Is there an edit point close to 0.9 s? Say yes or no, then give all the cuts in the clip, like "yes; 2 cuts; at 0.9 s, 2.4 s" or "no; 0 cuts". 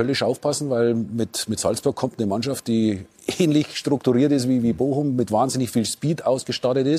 no; 0 cuts